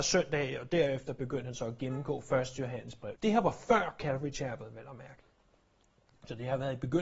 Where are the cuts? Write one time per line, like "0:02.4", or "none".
0:03.1